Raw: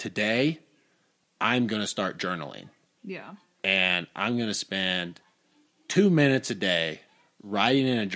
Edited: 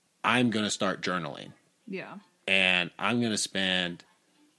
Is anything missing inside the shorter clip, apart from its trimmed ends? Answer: no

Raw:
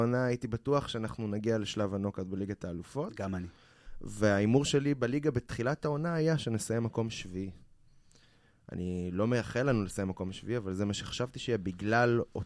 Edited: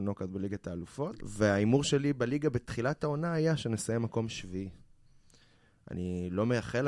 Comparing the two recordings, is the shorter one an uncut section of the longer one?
no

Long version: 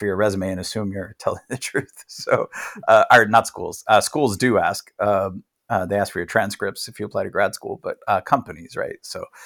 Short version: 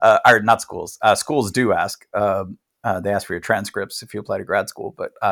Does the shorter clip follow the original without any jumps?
yes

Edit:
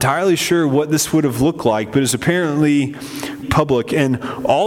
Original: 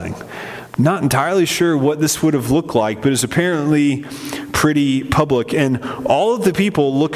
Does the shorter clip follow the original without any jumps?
no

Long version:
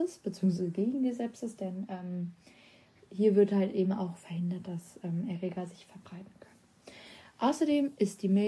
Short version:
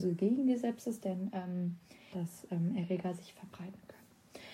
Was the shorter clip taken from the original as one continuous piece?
no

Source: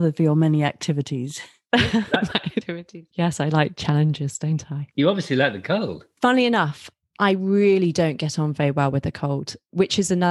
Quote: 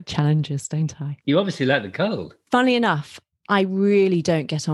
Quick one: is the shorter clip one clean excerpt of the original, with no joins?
yes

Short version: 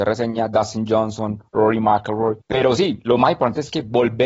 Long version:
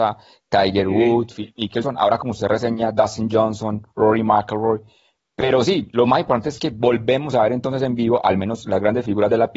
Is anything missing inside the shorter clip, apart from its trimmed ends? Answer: yes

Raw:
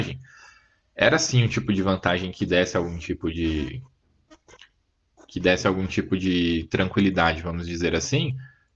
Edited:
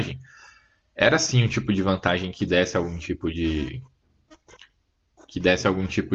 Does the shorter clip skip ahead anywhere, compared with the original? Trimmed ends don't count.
no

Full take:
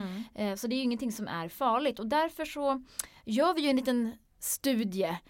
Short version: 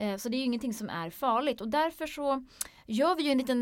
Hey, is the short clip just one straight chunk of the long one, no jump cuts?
yes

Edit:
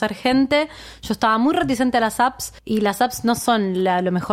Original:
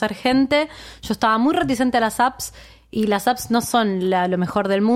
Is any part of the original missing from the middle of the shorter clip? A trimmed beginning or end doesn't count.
yes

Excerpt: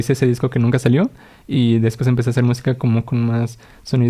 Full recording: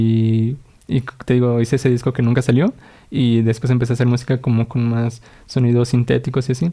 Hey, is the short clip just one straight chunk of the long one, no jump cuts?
yes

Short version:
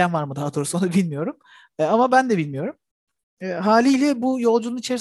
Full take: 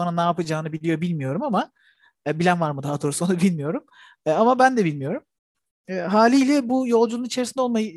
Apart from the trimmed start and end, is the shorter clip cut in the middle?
no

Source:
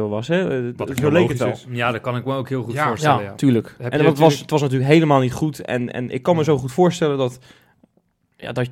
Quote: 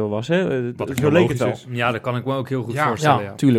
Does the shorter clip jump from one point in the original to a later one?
no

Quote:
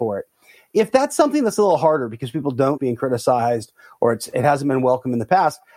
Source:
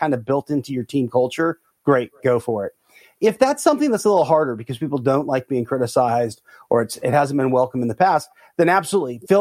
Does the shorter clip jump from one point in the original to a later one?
yes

